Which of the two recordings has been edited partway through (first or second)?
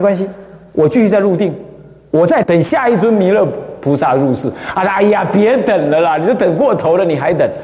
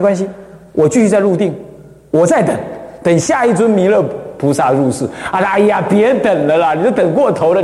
first